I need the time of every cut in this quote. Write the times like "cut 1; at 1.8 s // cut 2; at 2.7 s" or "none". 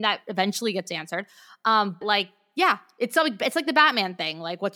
cut 1; at 2.0 s